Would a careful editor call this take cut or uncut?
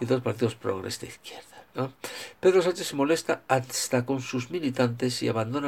uncut